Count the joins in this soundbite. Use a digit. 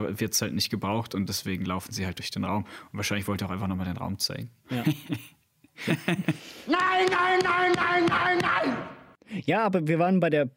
1